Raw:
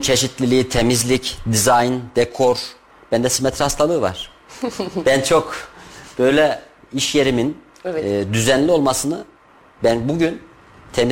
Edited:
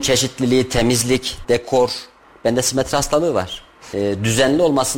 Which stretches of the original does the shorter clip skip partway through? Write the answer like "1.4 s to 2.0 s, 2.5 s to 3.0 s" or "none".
1.4 s to 2.1 s, 4.6 s to 8.0 s